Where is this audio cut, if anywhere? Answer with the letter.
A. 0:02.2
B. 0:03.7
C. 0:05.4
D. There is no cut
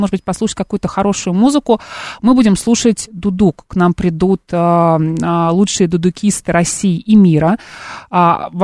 D